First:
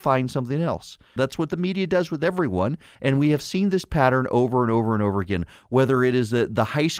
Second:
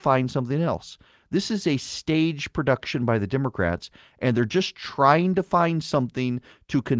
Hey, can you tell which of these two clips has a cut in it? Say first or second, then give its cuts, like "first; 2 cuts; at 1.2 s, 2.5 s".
first; 2 cuts; at 1.2 s, 2.9 s